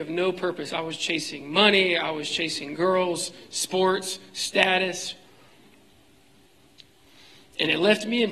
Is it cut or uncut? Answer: uncut